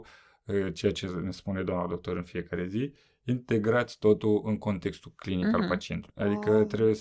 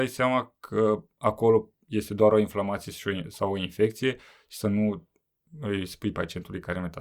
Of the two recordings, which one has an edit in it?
first; 1 cut; at 6.1 s

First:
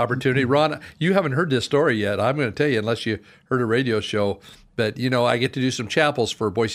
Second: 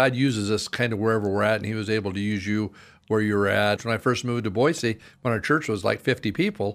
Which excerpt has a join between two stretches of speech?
second; 1 cut; at 3.8 s

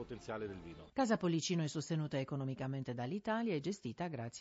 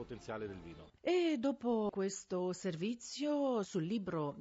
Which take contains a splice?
first; 1 cut; at 0.9 s

